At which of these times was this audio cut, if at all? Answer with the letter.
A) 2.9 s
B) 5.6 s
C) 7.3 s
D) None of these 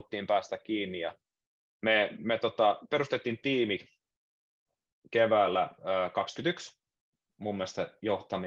C